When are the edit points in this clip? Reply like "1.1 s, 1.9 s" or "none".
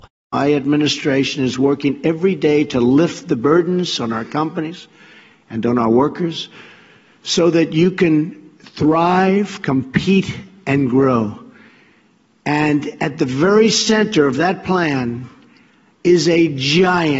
none